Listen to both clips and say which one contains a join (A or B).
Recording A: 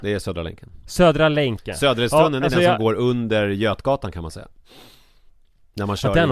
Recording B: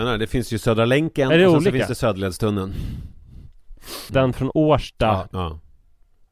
B